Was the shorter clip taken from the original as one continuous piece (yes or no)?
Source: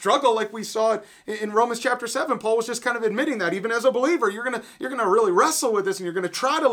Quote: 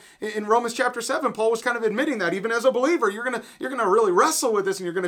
no